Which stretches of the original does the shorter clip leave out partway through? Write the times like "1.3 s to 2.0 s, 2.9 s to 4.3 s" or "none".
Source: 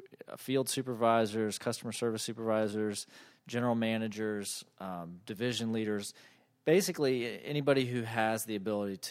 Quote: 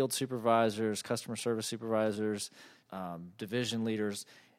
3.4 s to 4.7 s